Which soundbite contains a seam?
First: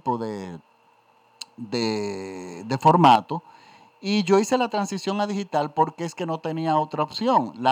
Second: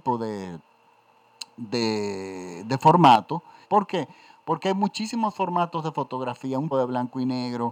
second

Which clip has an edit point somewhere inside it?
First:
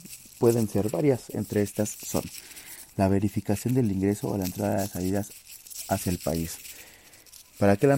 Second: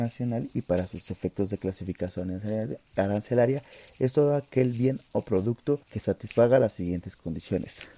second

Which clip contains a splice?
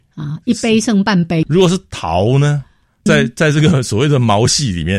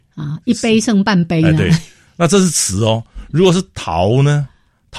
first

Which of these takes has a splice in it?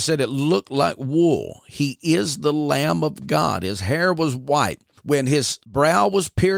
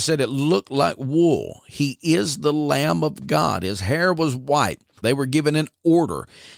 second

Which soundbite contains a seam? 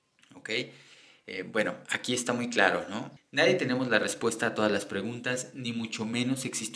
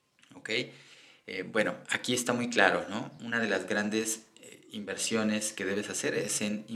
first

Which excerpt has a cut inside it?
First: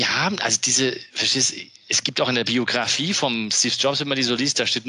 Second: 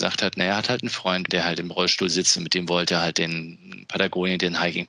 second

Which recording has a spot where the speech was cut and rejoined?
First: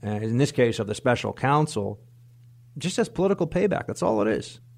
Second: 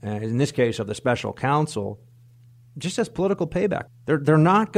second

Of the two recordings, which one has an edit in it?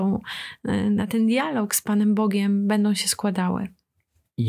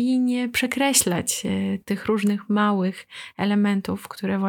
second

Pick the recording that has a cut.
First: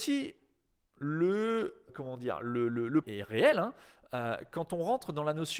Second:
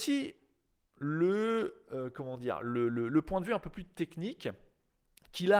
first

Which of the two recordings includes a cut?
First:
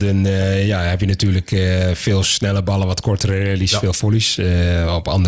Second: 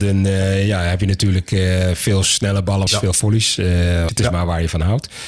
second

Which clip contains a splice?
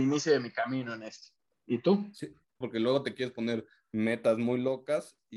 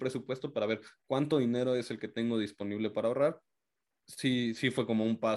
first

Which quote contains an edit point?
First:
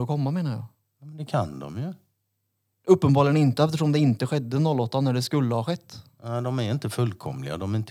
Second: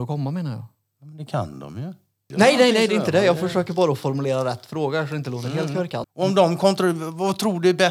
second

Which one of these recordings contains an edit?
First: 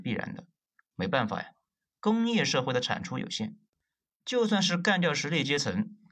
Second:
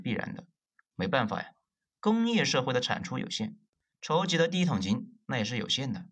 second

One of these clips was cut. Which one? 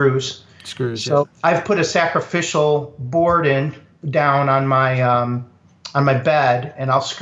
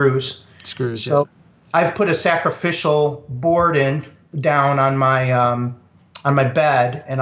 first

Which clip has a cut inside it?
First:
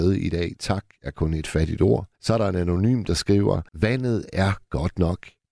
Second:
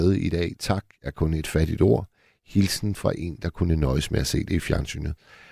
first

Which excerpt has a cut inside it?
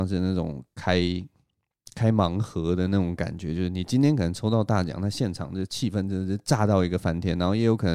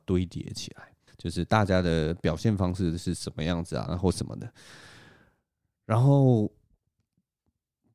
second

